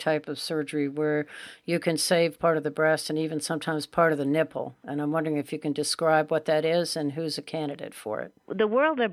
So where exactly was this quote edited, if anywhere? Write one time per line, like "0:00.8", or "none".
none